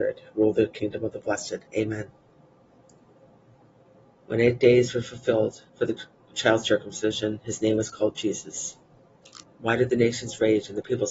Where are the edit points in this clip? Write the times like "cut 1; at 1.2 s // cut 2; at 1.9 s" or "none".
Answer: cut 1; at 1.7 s // cut 2; at 5.7 s // cut 3; at 9.4 s